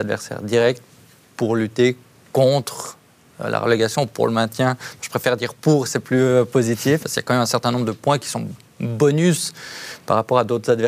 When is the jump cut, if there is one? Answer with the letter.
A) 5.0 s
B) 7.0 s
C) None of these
B